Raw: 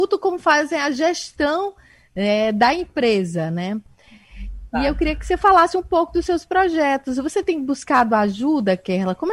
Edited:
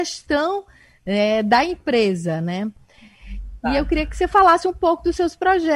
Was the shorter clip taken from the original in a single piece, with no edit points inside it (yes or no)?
yes